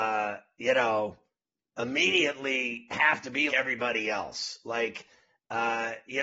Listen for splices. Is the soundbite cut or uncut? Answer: cut